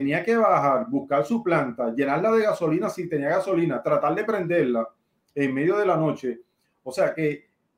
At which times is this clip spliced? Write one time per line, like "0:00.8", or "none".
none